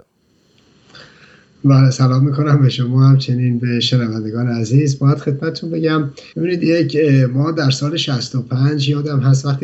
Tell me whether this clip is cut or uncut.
cut